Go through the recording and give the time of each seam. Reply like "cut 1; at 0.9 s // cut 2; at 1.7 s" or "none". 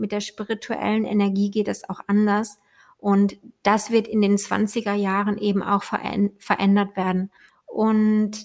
cut 1; at 7.5 s